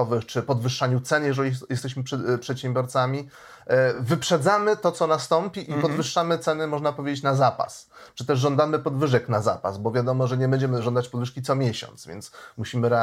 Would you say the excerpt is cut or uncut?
uncut